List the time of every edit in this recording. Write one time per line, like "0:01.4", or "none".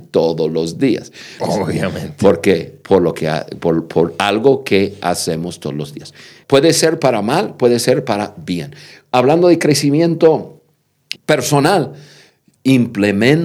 0:01.4
0:06.4
0:11.2

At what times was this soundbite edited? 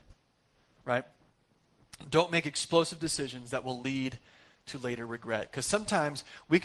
none

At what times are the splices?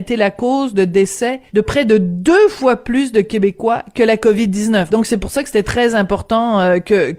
0:01.5
0:04.9

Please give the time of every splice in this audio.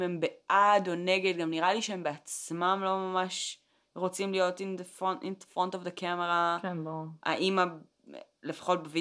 none

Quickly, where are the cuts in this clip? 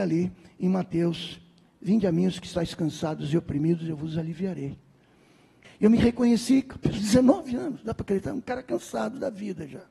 0:05.6

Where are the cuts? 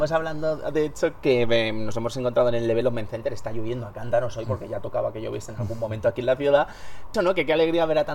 0:07.1

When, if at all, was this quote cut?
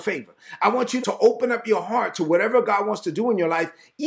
0:01.0

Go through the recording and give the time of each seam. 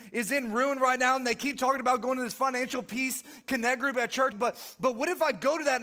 0:04.3

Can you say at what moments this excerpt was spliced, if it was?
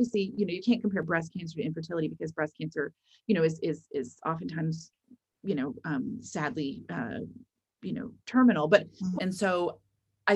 0:09.2

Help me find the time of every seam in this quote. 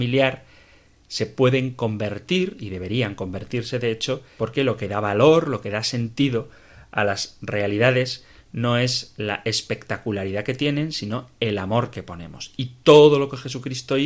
0:04.4

